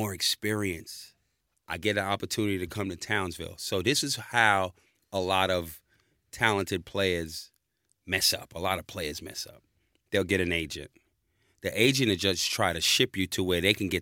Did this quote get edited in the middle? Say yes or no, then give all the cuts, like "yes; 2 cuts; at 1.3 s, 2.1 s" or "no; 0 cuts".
no; 0 cuts